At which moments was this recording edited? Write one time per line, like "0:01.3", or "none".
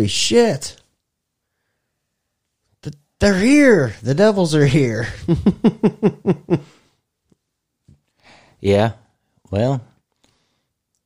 none